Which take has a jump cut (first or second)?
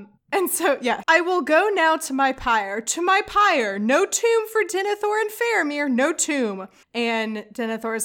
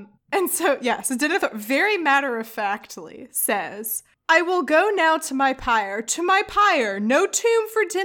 first